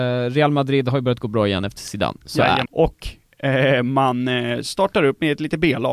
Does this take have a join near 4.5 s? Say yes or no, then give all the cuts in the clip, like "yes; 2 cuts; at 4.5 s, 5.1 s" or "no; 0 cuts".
no; 1 cut; at 2.7 s